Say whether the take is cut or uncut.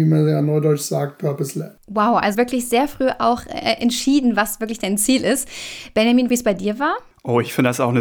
cut